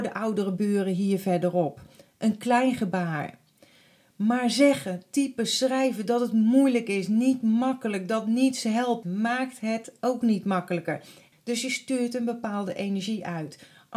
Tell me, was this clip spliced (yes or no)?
yes